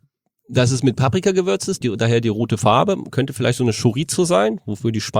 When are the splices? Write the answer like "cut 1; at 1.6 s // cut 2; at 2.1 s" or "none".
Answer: cut 1; at 1.8 s